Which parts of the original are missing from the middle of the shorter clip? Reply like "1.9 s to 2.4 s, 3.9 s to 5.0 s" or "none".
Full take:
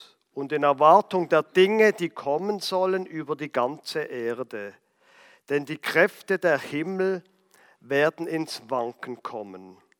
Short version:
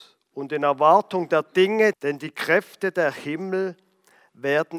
1.9 s to 5.4 s